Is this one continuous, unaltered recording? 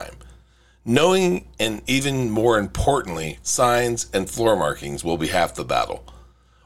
no; 1 cut; at 3.4 s

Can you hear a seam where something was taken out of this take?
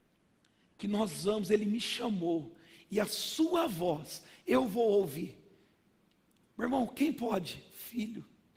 no; 0 cuts

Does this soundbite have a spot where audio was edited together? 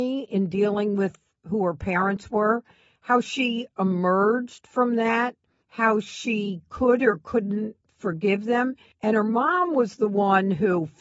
yes; 1 cut; at 8.9 s

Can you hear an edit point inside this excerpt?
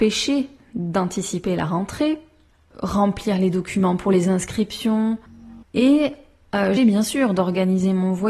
yes; 2 cuts; at 5.6 s, 6.8 s

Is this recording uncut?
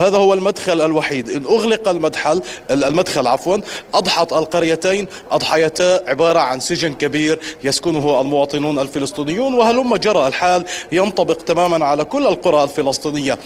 yes; 0 cuts

